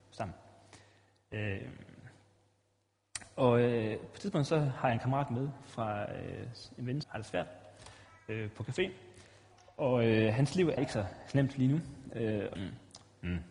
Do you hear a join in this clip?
yes; 3 cuts; at 7.0 s, 10.8 s, 12.5 s

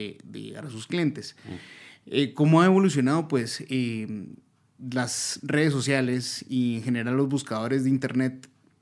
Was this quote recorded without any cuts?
yes; 0 cuts

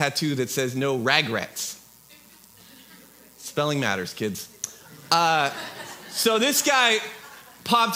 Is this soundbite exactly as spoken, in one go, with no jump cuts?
yes; 0 cuts

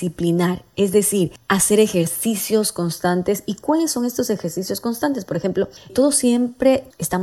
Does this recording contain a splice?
yes; 1 cut; at 5.9 s

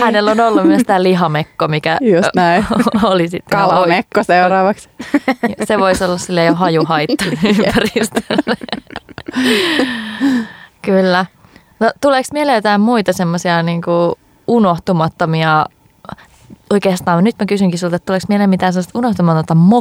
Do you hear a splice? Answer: no; 0 cuts

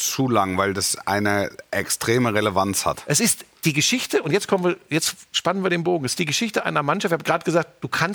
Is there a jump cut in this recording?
no; 0 cuts

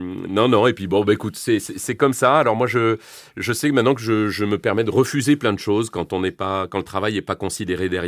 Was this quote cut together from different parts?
no; 0 cuts

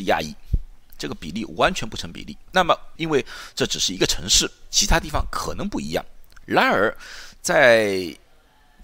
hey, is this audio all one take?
no; 2 cuts; at 3.0 s, 6.4 s

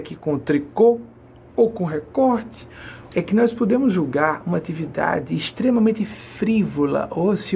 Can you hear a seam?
yes; 1 cut; at 3.1 s

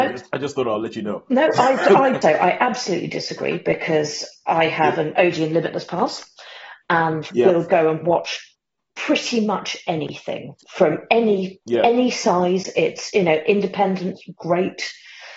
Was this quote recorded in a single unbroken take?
no; 1 cut; at 2.2 s

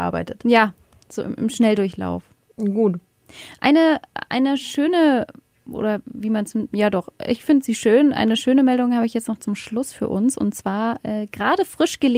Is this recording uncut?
yes; 0 cuts

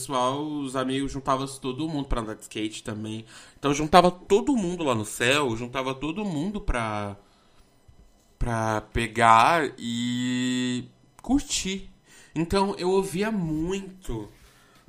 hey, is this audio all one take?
yes; 0 cuts

